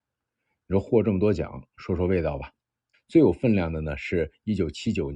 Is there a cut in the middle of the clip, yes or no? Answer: yes